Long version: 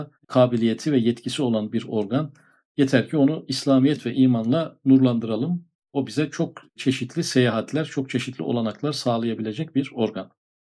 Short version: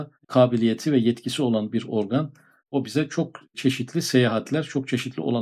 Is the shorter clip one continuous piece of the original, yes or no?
no